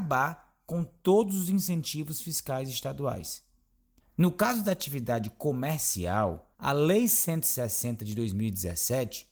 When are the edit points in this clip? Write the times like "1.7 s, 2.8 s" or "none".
4.0 s, 6.5 s